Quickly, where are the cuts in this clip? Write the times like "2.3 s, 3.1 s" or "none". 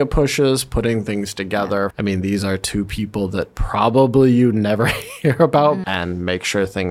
1.9 s, 5.8 s

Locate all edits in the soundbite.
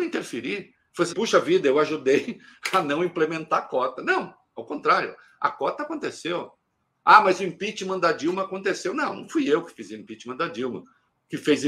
1.1 s

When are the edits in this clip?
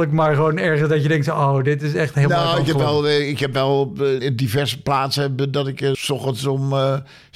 4.2 s, 5.9 s

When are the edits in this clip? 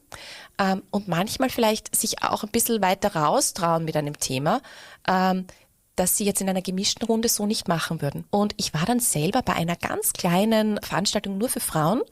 8.3 s, 10.8 s

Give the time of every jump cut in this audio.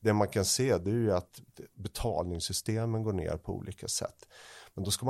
none

